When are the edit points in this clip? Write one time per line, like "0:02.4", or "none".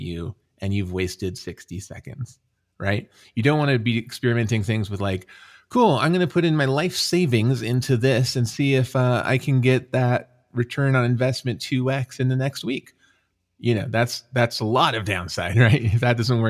none